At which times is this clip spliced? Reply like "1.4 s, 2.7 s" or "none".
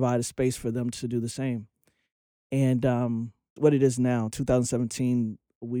3.6 s